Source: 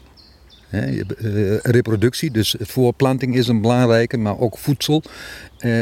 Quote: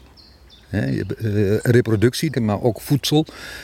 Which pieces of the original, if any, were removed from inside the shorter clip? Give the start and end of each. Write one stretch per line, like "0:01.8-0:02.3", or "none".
0:02.3-0:04.1